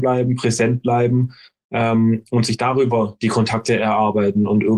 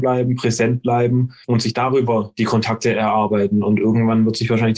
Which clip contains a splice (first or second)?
second